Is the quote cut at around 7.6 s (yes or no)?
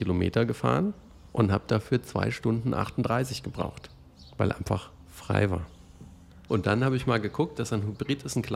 yes